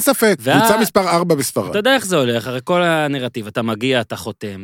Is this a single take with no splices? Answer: yes; 0 cuts

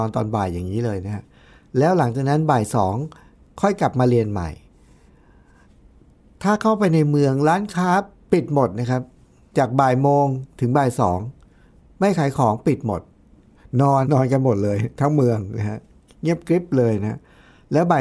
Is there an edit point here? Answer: yes; 1 cut; at 14.0 s

